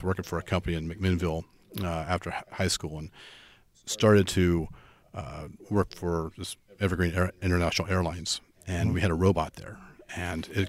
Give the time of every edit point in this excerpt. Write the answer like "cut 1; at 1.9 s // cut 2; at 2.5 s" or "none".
none